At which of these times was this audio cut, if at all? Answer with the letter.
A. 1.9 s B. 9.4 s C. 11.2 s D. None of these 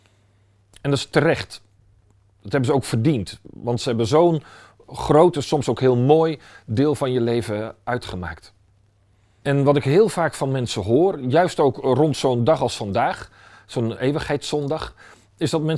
B